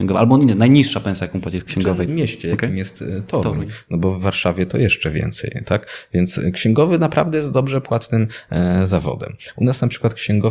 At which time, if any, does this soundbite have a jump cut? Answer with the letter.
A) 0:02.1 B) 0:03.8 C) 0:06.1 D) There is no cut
A